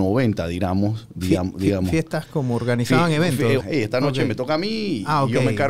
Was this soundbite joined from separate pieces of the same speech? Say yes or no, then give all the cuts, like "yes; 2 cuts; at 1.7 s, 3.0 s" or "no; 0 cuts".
yes; 1 cut; at 3.6 s